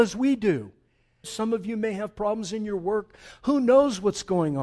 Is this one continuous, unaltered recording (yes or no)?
no